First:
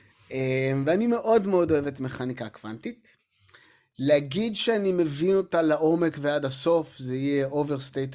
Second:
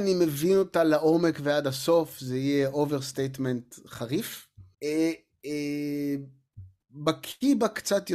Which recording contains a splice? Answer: second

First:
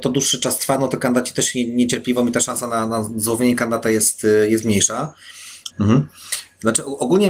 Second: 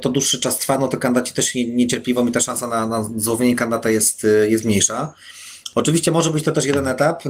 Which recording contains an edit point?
first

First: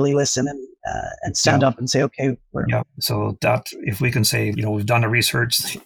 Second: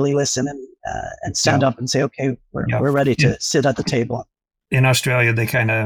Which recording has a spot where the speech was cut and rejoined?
first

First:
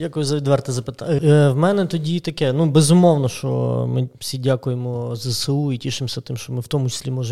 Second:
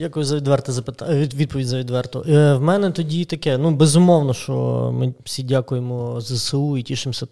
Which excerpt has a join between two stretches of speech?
first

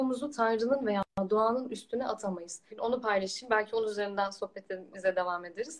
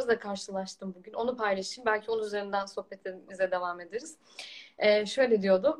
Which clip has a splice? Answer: first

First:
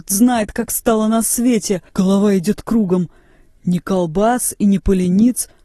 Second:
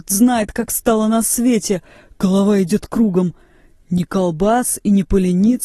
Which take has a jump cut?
first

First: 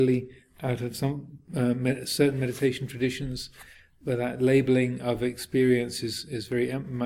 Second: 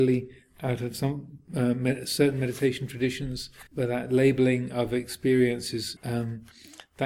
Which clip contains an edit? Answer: second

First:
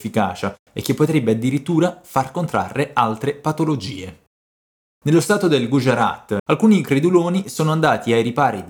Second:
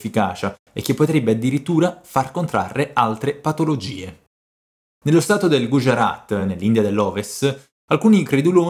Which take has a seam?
first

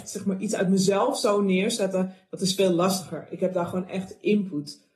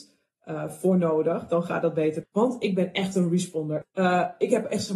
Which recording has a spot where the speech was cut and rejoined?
second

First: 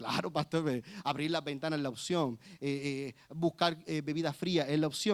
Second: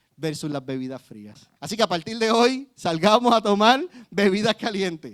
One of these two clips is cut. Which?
second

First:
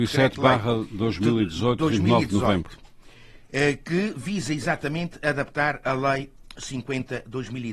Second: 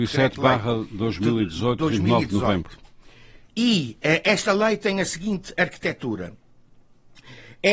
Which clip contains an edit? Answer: second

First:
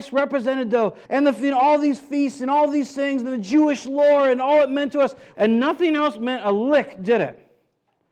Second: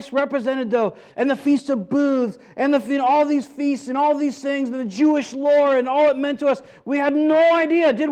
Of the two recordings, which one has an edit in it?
first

